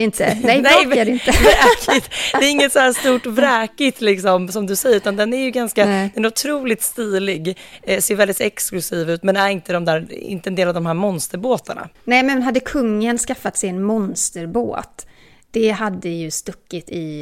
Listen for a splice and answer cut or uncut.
cut